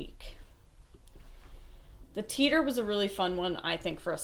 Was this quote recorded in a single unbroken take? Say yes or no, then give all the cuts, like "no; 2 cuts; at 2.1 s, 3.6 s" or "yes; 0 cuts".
no; 1 cut; at 2.0 s